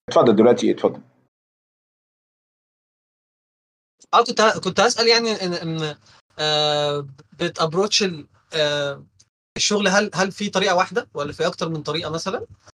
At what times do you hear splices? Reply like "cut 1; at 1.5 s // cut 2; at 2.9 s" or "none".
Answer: none